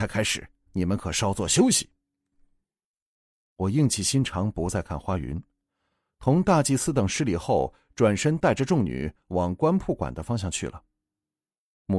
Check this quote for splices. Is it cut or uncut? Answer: uncut